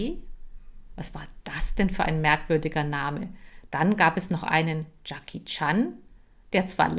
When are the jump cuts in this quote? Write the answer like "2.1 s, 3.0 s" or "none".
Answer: 3.7 s